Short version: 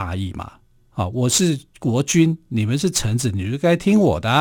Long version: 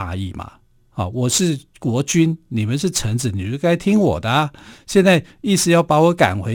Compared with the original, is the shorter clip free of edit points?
yes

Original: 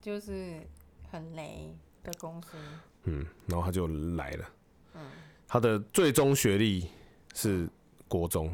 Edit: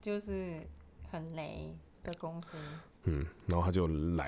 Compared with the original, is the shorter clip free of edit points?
yes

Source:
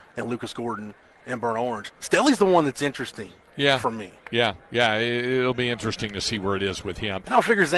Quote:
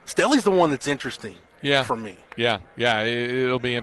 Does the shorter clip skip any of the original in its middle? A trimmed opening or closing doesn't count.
no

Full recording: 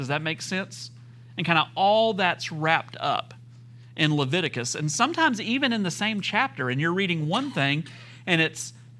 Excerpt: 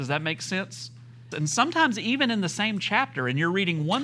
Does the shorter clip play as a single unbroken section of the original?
no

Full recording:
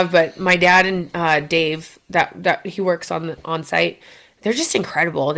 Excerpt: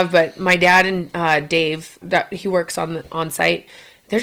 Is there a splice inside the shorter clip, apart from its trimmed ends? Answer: yes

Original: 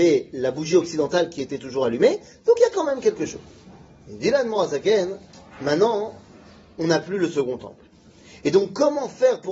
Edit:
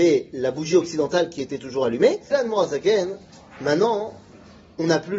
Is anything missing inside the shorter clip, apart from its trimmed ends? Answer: yes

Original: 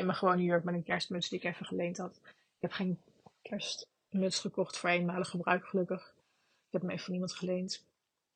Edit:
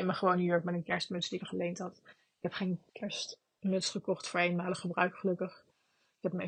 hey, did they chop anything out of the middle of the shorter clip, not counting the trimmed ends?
yes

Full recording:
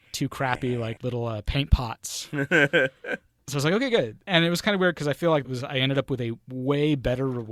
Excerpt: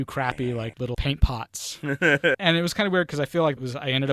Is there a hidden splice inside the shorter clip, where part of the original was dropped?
yes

